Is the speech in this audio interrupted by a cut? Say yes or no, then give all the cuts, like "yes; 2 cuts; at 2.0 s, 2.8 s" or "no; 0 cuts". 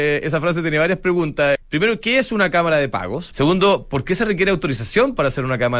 yes; 2 cuts; at 1.6 s, 3.3 s